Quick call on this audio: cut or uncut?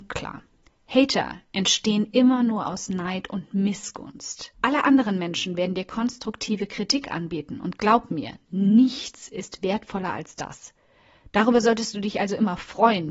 cut